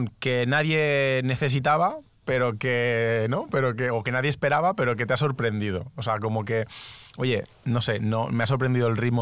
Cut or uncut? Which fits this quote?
uncut